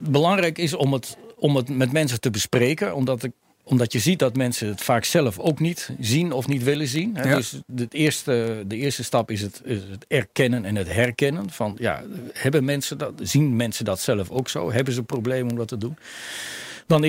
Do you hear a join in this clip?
yes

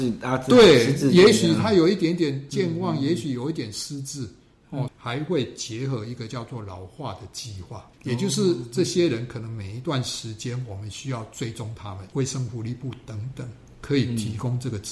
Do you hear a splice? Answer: yes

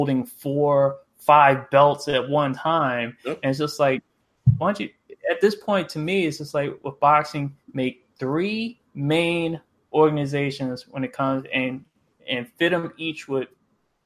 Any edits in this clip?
no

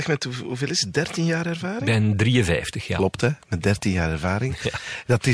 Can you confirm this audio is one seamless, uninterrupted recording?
yes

